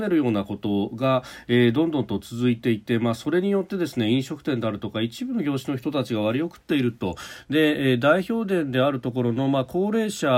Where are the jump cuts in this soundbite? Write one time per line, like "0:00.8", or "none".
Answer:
none